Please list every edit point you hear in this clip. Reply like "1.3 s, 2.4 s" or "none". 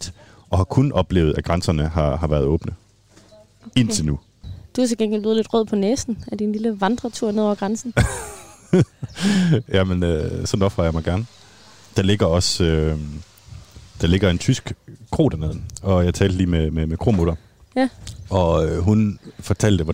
none